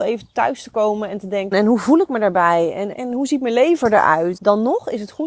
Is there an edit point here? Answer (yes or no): yes